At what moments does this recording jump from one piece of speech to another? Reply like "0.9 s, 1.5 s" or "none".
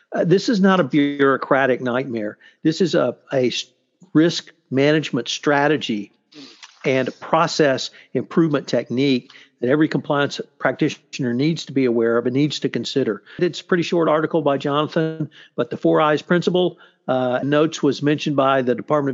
13.4 s, 17.4 s